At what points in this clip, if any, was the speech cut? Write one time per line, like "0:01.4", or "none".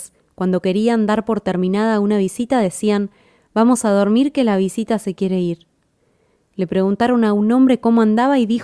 none